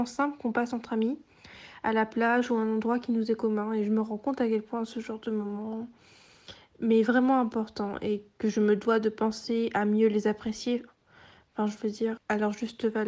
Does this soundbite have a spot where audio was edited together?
yes; 1 cut; at 12.2 s

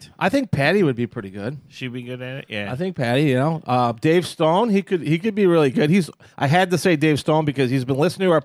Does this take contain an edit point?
no; 0 cuts

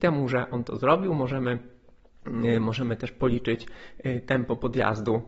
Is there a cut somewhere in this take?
no; 0 cuts

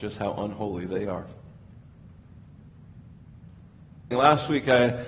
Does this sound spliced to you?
yes; 1 cut; at 4.1 s

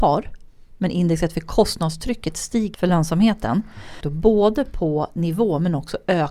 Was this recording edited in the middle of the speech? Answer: yes; 2 cuts; at 2.7 s, 4.0 s

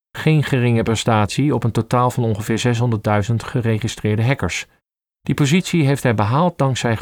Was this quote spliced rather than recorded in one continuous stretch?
no; 0 cuts

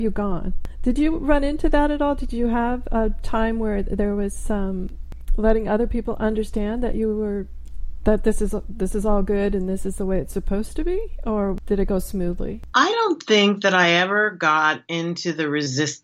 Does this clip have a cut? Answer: no; 0 cuts

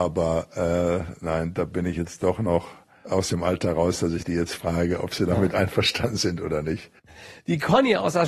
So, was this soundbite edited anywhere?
no; 0 cuts

